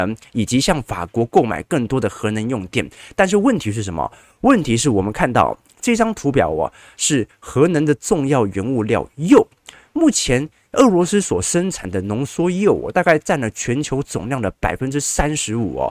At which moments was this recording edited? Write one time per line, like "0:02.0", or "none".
none